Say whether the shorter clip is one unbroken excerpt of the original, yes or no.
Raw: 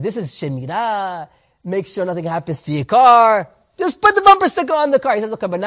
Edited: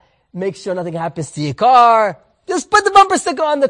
yes